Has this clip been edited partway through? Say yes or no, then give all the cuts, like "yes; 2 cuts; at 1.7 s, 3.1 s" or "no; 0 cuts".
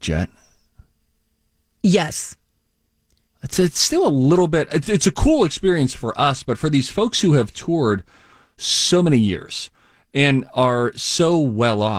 no; 0 cuts